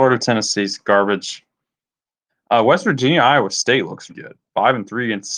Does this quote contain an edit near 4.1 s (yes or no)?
yes